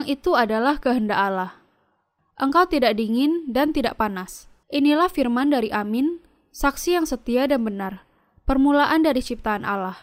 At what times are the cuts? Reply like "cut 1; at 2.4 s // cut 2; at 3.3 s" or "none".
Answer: cut 1; at 2.2 s // cut 2; at 4.6 s